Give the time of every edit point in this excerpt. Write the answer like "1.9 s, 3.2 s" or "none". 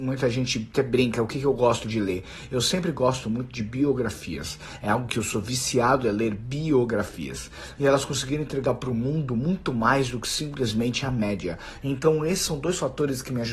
7.7 s, 11.8 s